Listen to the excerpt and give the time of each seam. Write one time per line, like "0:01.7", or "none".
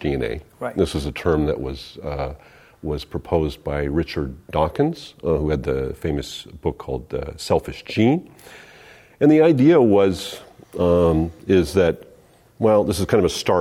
none

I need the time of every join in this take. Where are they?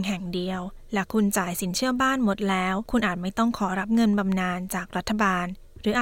none

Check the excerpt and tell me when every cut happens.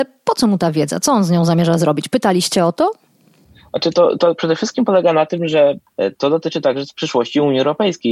none

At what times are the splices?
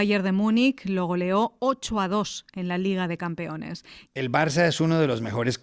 0:04.1

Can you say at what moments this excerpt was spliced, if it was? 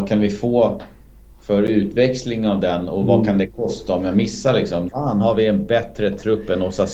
0:04.9

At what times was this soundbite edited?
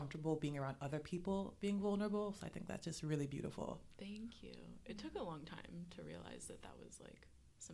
none

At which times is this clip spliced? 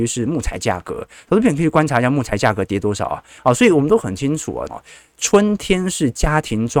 0:03.4
0:04.7

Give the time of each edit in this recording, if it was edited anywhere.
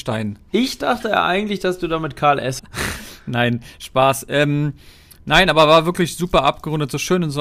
0:02.6

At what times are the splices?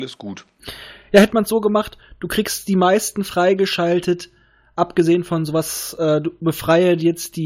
none

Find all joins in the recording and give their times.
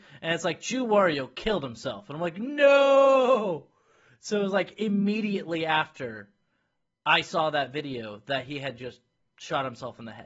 none

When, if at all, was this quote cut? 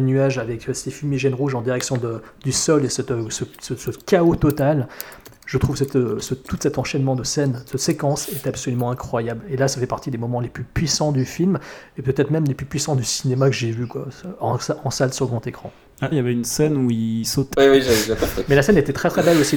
0:16.1
0:17.5

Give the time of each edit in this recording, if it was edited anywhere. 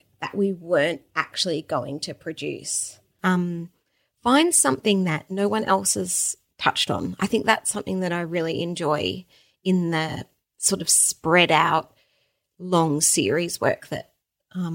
0:03.2

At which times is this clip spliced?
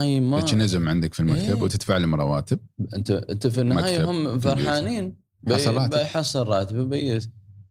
none

